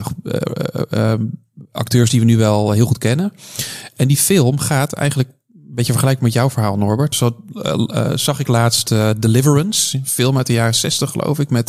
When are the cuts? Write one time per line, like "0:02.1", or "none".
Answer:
0:07.1